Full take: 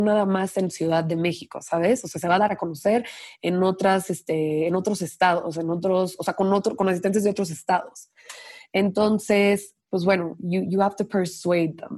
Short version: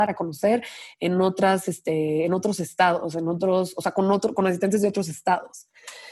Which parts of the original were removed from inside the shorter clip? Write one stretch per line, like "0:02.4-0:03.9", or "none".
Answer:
none